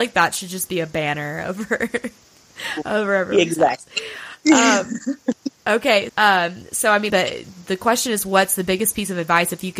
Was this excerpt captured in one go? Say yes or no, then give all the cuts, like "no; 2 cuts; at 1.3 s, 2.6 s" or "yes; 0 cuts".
no; 2 cuts; at 6.1 s, 7.1 s